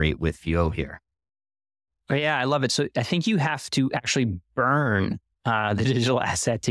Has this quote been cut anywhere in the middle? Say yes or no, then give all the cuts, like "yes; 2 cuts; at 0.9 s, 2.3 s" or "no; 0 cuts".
no; 0 cuts